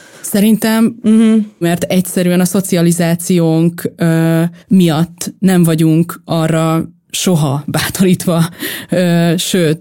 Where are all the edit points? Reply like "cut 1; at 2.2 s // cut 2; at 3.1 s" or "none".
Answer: cut 1; at 1.6 s // cut 2; at 4.6 s

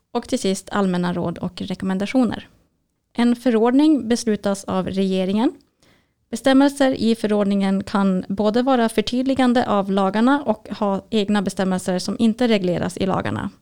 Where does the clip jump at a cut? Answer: cut 1; at 3.0 s

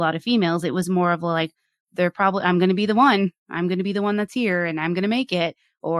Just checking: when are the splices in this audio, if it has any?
cut 1; at 1.8 s

